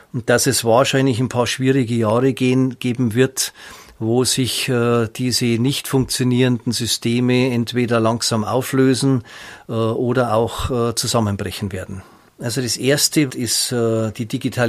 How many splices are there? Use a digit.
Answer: 2